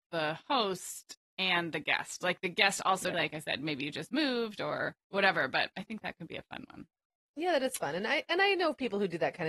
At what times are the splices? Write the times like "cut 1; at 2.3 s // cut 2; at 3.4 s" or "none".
cut 1; at 3.1 s // cut 2; at 5.0 s